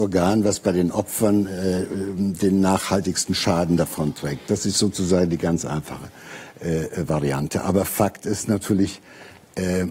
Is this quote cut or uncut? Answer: uncut